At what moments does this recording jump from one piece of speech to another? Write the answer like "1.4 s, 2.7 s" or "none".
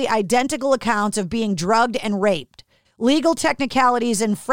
2.8 s